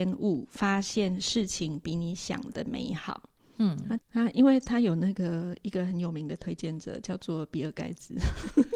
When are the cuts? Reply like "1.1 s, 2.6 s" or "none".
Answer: 4.0 s